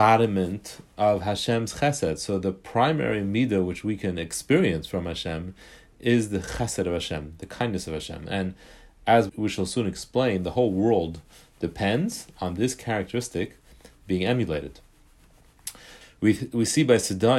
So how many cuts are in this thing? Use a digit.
2